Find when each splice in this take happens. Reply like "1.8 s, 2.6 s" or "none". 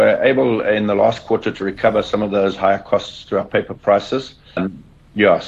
4.6 s